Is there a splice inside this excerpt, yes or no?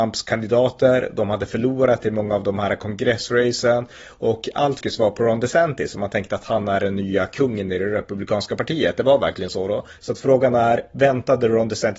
yes